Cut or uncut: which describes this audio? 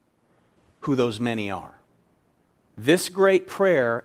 cut